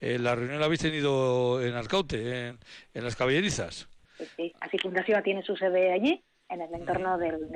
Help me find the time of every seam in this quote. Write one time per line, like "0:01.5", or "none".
0:04.1